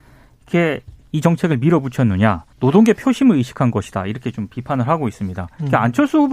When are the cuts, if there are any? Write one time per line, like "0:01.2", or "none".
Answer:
0:02.5